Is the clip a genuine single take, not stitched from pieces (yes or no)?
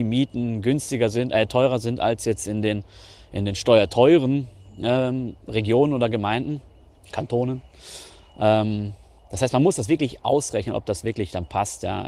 yes